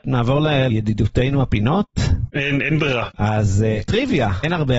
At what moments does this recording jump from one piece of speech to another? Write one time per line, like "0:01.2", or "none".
none